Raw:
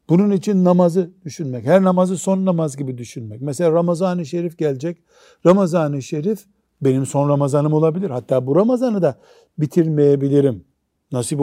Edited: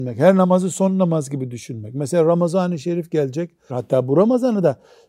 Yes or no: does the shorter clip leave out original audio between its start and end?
yes